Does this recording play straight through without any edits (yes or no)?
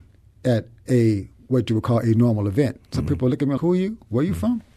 no